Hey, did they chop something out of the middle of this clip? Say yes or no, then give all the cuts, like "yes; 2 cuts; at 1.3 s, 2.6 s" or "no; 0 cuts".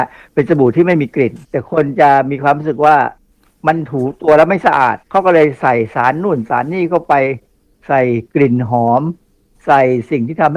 yes; 2 cuts; at 1.4 s, 5.0 s